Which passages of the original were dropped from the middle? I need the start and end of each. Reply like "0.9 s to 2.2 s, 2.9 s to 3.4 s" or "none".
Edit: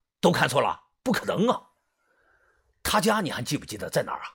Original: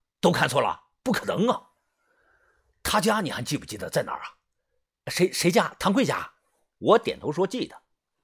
none

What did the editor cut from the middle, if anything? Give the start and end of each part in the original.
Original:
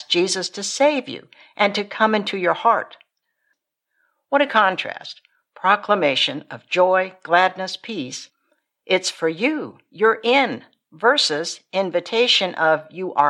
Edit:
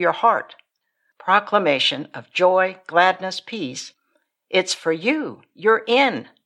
3.5 s to 5.5 s

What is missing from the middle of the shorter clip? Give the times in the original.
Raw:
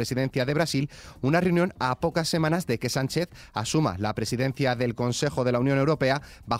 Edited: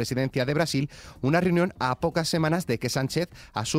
none

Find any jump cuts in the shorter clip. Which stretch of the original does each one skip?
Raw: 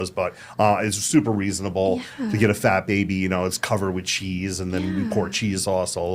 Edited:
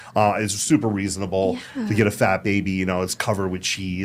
none

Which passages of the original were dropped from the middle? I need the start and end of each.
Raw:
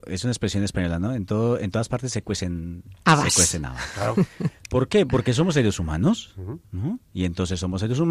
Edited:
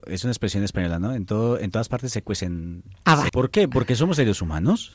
3.3 s to 4.7 s

